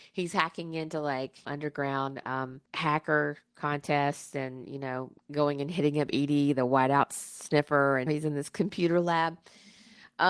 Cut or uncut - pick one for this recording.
cut